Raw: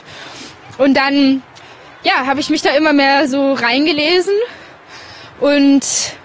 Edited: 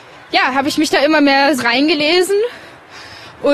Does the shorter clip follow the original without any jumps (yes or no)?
no